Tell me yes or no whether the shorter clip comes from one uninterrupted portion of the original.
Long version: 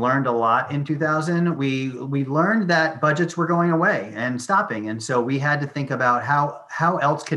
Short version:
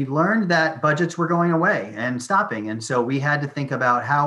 yes